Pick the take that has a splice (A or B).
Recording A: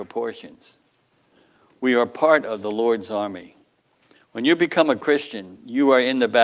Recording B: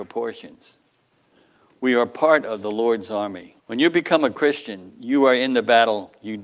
B